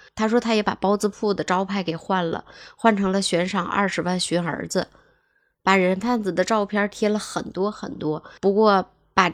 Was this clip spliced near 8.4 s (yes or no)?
yes